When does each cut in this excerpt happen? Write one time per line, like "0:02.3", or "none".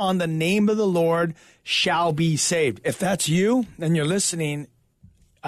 0:02.8

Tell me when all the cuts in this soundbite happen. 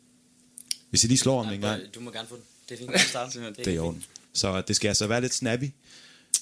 0:02.9
0:04.2

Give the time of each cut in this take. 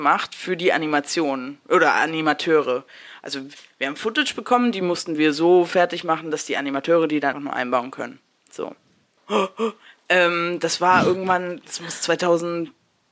0:07.3
0:09.2

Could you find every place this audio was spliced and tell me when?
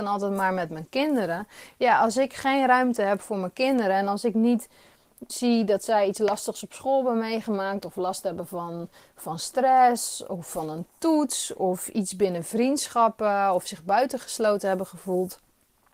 0:05.3

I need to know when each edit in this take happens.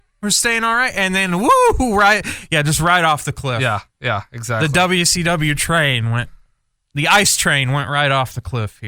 none

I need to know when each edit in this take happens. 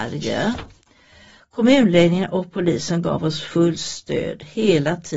0:01.4

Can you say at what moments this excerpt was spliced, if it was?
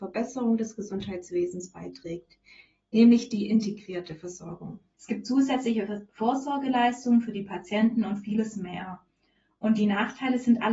0:04.9

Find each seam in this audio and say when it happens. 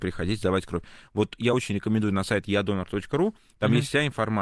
none

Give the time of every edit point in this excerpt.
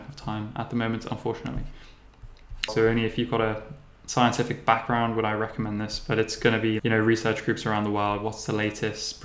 0:02.7
0:06.8

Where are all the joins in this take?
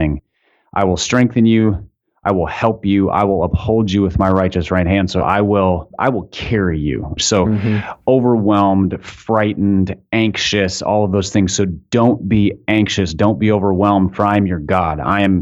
0:07.2

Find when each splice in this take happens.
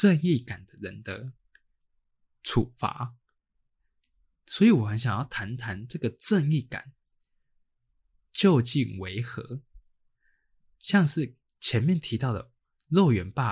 none

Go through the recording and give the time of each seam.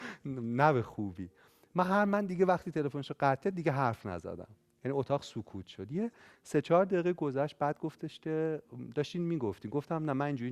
none

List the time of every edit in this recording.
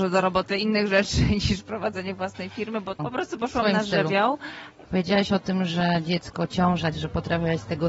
0:03.0
0:04.8
0:06.9

